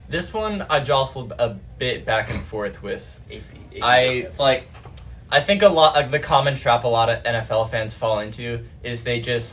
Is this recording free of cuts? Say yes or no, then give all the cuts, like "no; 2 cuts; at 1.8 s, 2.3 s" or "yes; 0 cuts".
no; 1 cut; at 3.2 s